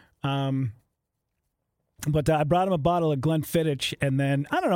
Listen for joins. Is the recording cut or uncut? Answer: uncut